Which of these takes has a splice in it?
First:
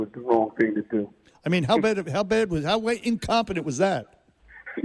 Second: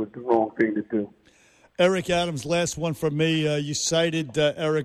first; 1 cut; at 1.3 s

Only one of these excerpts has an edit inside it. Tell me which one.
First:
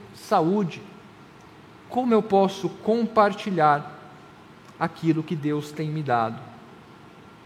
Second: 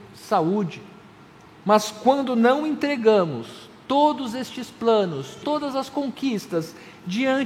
second; 2 cuts; at 1.6 s, 5.4 s

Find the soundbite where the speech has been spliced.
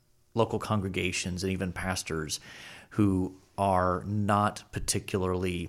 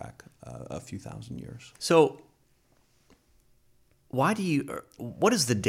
second; 1 cut; at 1.8 s

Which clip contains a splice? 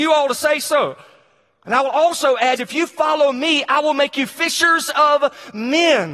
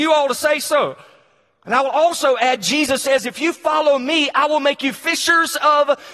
first; 1 cut; at 2.6 s

